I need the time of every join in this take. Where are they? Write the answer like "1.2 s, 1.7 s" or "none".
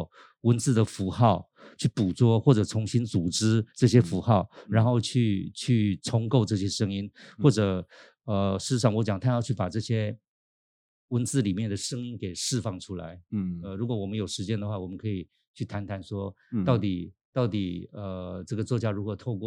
none